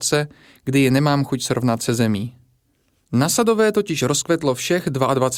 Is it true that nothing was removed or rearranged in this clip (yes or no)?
yes